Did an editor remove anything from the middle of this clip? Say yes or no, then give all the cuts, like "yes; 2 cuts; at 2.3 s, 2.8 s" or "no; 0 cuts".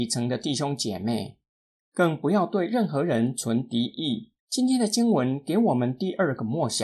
yes; 1 cut; at 4.4 s